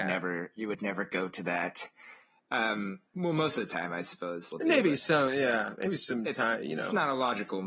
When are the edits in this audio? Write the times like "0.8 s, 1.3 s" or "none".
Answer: 4.5 s